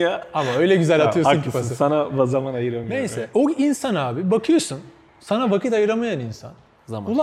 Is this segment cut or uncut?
uncut